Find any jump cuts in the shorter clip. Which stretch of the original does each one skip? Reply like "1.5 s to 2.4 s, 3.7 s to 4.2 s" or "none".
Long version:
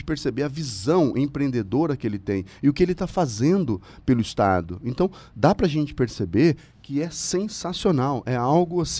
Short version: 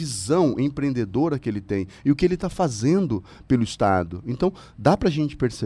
none